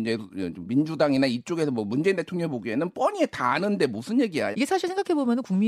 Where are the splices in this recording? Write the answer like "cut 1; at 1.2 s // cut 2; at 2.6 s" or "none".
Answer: cut 1; at 4.5 s